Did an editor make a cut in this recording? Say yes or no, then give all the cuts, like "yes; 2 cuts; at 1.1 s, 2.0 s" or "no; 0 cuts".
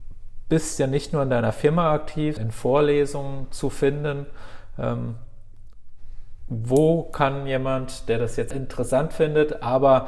yes; 1 cut; at 2.4 s